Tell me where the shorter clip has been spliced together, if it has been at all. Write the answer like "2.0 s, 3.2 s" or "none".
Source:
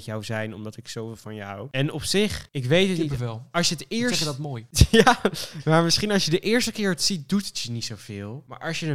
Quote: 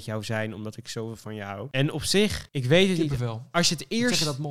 none